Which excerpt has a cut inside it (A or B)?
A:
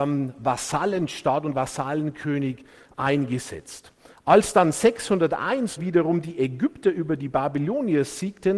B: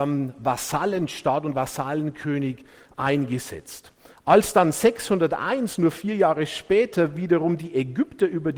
A